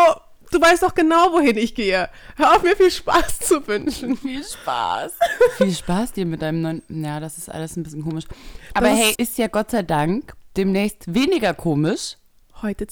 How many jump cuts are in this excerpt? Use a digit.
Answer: 1